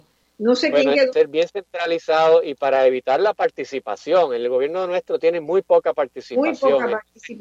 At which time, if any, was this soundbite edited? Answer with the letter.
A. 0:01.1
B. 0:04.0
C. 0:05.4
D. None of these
A